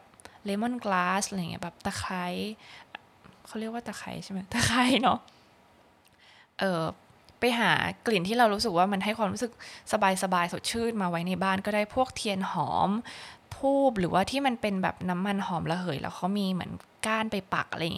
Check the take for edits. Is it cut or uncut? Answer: uncut